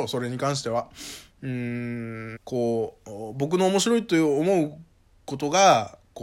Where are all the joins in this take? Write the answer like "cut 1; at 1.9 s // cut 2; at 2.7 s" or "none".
cut 1; at 2.4 s